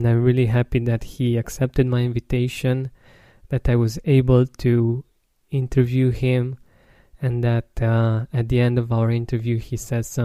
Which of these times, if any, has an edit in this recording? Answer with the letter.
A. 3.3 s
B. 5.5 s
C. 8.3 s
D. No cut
D